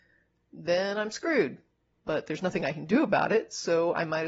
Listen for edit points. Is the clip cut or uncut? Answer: uncut